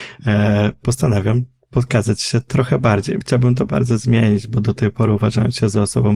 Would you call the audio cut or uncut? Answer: cut